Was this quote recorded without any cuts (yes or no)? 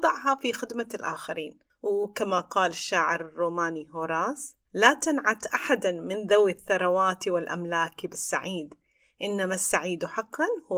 no